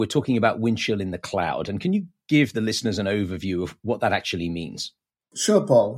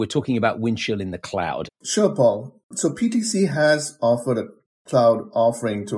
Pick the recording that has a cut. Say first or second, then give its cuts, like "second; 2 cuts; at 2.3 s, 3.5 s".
second; 1 cut; at 1.7 s